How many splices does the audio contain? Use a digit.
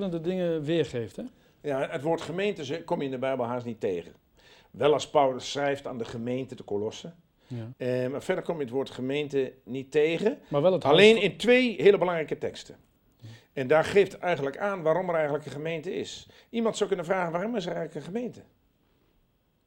1